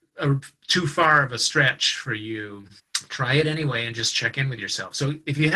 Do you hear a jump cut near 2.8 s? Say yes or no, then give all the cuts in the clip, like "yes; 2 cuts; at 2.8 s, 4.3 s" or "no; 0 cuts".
no; 0 cuts